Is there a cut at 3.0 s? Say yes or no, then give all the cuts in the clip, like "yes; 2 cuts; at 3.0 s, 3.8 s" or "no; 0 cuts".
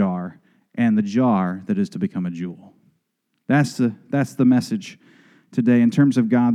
no; 0 cuts